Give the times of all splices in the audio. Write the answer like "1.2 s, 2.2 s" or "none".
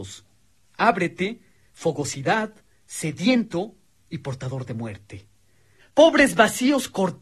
1.6 s, 5.8 s